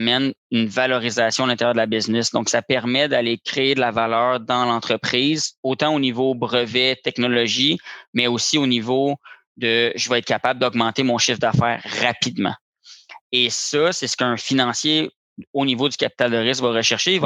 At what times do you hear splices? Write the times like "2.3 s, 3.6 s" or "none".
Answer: none